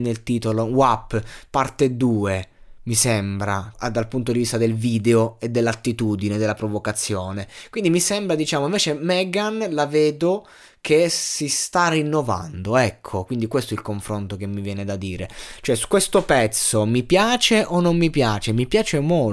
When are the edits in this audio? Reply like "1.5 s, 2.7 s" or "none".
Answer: 3.7 s